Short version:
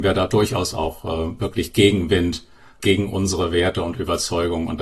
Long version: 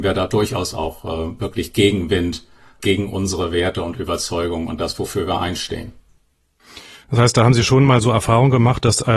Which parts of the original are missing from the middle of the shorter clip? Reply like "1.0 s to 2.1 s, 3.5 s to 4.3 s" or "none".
none